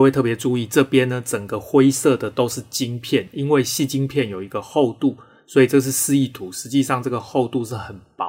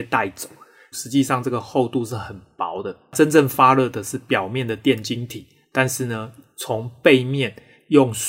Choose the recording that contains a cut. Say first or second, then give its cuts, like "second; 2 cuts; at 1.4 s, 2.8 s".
second; 1 cut; at 0.9 s